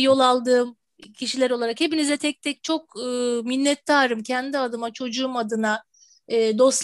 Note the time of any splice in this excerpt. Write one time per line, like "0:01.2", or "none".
none